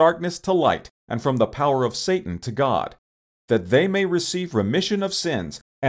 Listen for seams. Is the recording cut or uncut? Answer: uncut